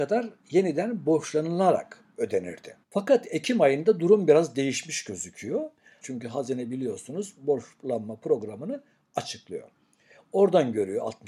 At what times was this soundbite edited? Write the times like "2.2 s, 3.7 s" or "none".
2.8 s, 6.0 s